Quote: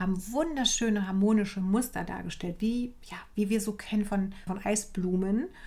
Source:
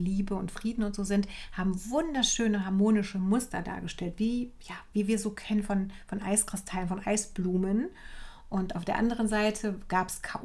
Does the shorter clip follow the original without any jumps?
no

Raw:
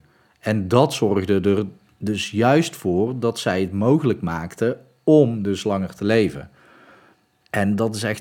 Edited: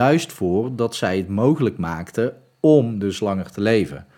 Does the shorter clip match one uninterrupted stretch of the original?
yes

